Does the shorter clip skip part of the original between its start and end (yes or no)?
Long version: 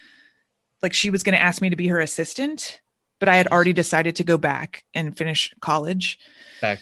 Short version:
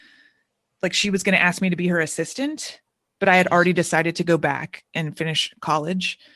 no